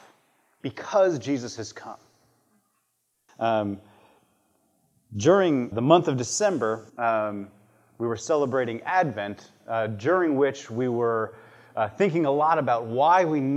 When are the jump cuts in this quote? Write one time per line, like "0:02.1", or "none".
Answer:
0:03.3
0:05.7
0:06.9